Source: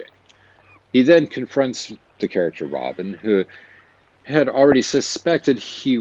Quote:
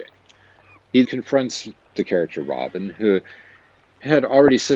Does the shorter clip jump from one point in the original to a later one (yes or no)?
yes